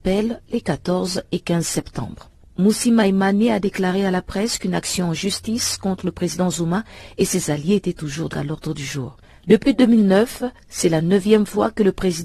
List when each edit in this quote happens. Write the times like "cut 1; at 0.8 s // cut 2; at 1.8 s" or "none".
cut 1; at 8.3 s